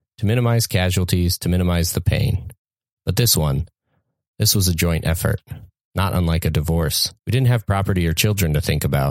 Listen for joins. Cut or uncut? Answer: cut